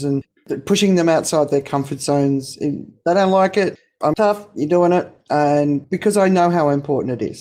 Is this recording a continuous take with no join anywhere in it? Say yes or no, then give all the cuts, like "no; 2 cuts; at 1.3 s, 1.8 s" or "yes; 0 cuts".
no; 2 cuts; at 4.1 s, 5.8 s